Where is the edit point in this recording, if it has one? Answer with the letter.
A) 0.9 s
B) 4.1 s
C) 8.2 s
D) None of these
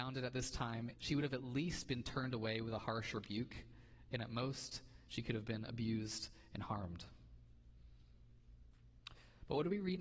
A